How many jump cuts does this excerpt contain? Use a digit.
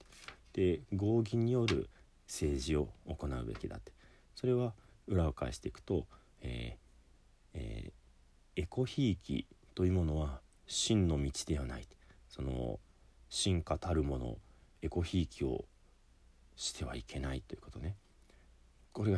0